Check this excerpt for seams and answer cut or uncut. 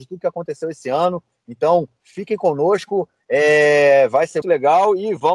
cut